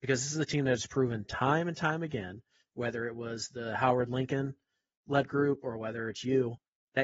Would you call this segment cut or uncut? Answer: uncut